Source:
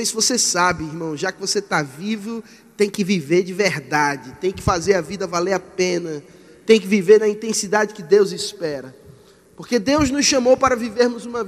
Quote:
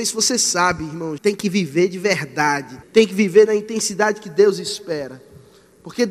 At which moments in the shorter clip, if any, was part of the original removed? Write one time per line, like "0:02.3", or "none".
0:01.2
0:02.8